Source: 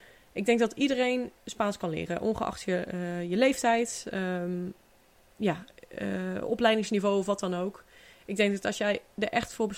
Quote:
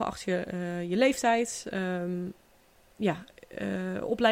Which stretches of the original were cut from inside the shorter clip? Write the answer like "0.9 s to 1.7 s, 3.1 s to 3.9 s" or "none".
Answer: none